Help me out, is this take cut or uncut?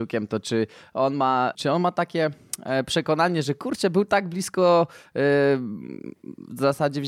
cut